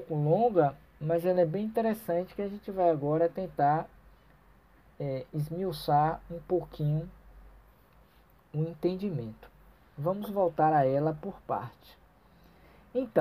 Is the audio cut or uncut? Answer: uncut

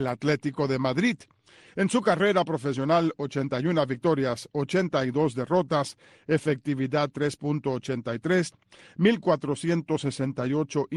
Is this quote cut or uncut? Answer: cut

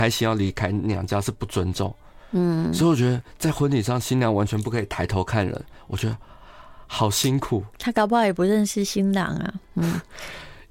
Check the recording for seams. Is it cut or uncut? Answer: uncut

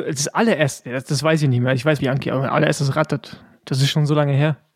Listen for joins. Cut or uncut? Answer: cut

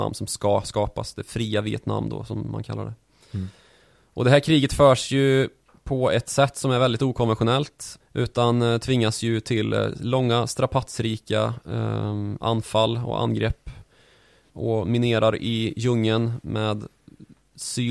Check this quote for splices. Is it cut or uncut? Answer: cut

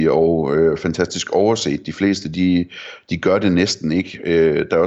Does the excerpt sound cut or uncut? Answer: uncut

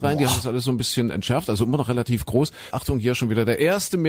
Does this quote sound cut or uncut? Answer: cut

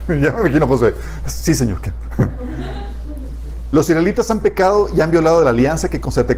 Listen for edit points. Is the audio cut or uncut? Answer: uncut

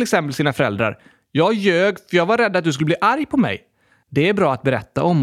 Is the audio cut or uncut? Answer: uncut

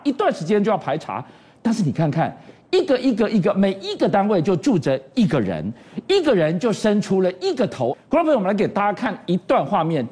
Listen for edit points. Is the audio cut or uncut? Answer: cut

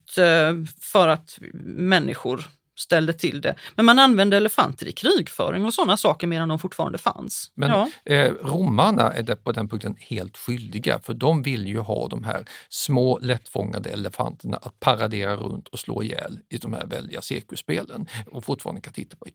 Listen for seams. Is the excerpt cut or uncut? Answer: cut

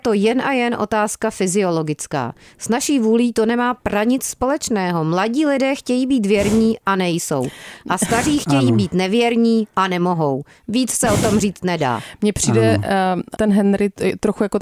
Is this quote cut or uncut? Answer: cut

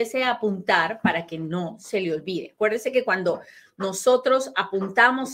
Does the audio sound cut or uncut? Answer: uncut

